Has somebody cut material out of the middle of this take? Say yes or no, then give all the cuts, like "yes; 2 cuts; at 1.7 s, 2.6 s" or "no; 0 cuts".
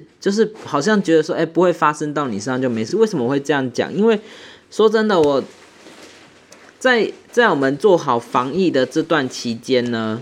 no; 0 cuts